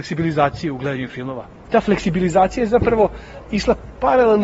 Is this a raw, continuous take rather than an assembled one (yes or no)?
yes